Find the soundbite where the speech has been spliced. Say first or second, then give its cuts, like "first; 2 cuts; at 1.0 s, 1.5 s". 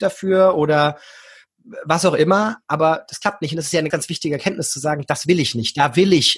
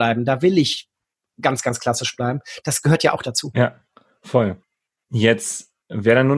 first; 1 cut; at 3.9 s